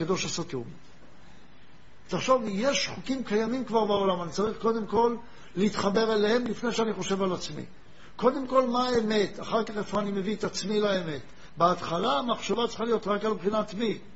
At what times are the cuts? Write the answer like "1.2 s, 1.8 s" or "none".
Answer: 2.1 s, 11.5 s